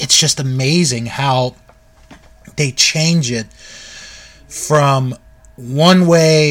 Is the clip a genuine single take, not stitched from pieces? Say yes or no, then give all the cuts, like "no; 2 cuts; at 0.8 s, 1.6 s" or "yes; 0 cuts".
yes; 0 cuts